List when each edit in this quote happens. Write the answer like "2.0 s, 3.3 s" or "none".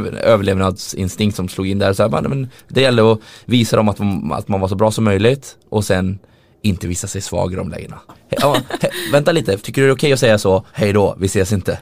8.1 s, 9.6 s, 10.7 s